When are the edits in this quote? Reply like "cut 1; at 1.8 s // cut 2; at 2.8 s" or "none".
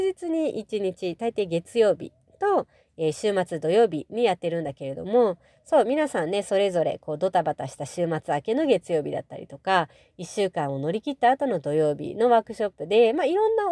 none